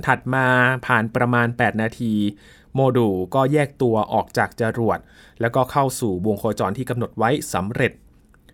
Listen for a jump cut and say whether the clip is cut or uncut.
cut